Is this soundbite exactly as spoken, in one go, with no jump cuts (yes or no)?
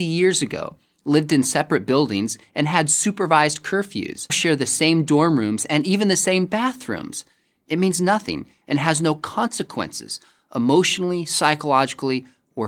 no